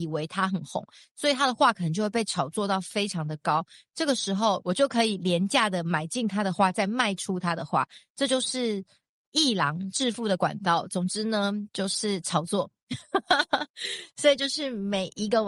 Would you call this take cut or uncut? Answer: uncut